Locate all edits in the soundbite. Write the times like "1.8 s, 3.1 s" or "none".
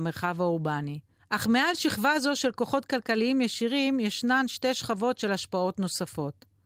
1.2 s